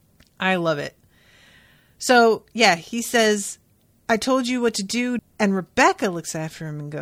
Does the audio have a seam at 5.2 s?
yes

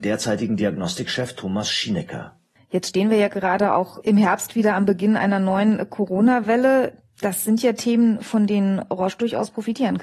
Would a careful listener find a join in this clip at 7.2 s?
no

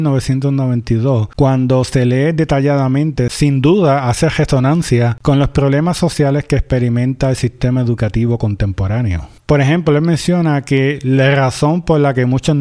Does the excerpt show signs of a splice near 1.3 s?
no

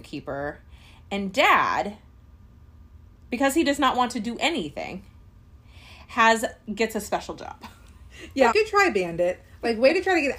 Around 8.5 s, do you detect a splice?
yes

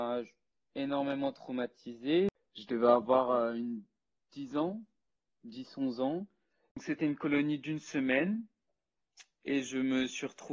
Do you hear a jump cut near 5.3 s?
no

